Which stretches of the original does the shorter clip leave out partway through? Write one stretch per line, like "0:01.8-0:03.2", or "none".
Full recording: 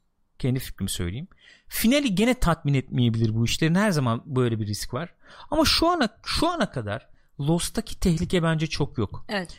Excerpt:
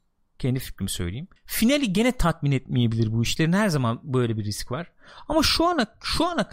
0:01.4-0:01.6